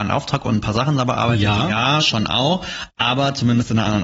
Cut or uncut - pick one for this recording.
uncut